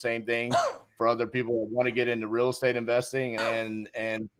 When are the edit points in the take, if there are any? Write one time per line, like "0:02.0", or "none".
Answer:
0:03.4